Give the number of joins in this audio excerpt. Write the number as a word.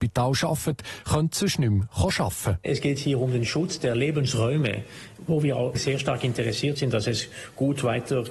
zero